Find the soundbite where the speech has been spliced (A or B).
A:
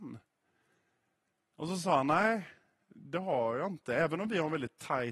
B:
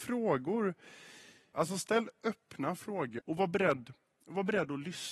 B